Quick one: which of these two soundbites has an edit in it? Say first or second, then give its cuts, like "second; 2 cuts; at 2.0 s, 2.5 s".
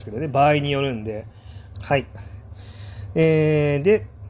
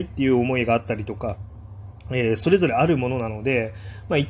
first; 1 cut; at 1.7 s